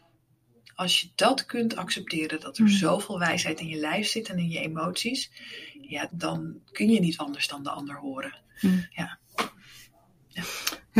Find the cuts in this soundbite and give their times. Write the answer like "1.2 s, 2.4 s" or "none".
6.1 s